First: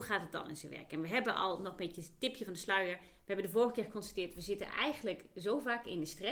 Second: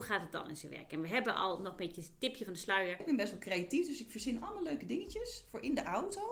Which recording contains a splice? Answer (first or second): second